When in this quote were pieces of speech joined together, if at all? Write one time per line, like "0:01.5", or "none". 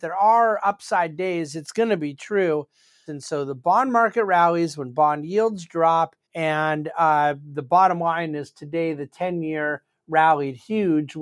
0:03.1
0:06.2

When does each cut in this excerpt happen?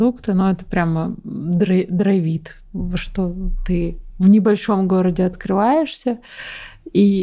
none

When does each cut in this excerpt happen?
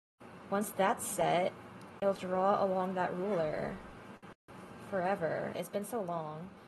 0:02.2
0:05.6

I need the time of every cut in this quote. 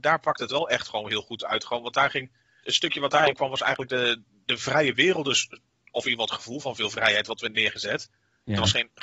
0:02.6

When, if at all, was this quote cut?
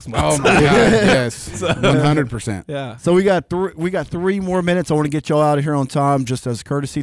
none

